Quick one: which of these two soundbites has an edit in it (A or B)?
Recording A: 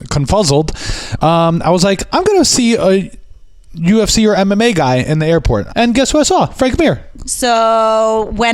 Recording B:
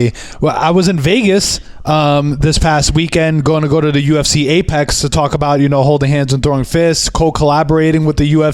A